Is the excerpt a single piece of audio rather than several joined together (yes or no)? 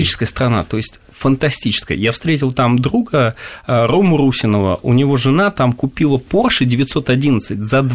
yes